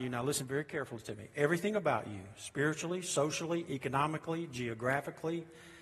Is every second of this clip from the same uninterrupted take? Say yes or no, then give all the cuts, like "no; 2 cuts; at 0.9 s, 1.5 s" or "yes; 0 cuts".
yes; 0 cuts